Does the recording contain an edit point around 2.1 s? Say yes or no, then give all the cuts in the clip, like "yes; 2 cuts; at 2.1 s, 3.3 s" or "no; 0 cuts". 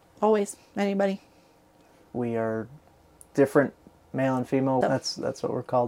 yes; 2 cuts; at 2.1 s, 4.8 s